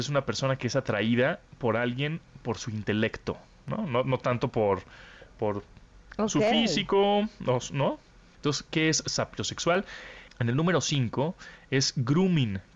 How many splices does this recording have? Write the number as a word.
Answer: two